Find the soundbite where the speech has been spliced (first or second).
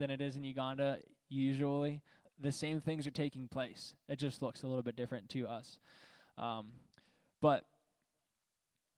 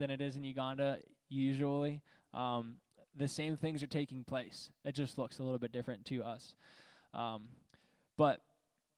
first